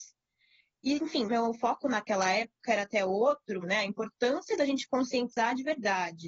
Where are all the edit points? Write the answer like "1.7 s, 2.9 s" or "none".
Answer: 1.3 s, 3.6 s